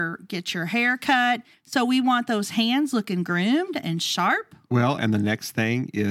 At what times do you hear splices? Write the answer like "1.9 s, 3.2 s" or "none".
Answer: 1.5 s

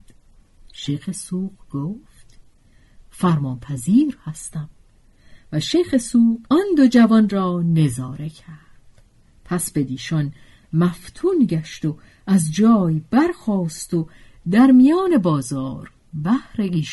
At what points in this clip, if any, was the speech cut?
6.5 s

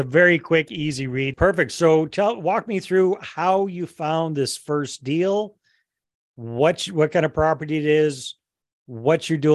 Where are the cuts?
1.3 s

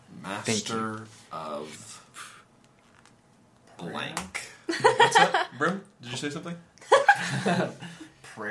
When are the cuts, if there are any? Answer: none

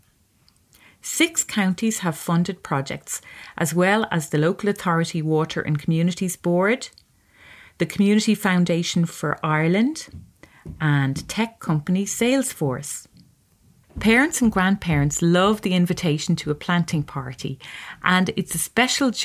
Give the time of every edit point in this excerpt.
13.8 s

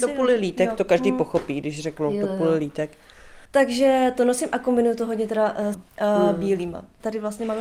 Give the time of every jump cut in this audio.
3.5 s, 5.7 s

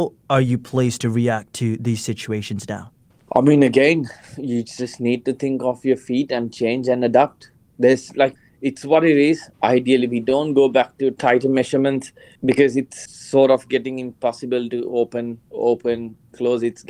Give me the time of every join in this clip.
9.5 s, 15.4 s

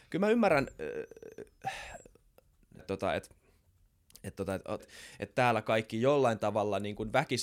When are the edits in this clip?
2.8 s, 4.8 s

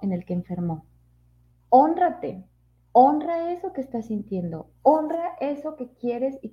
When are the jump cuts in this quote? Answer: 1.5 s

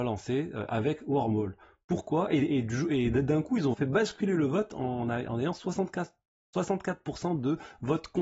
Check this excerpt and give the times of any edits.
3.7 s

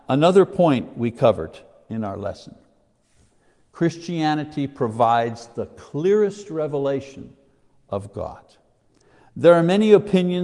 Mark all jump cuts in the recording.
none

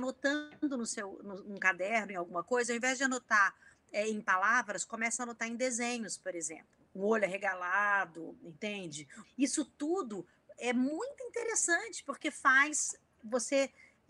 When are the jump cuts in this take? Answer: 6.9 s, 9.2 s

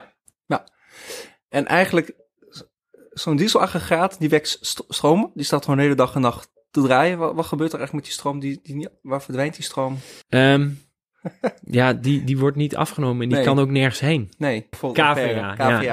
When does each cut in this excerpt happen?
10.2 s, 14.7 s

